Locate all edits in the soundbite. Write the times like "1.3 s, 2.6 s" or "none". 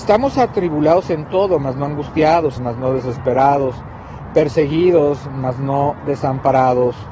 2.6 s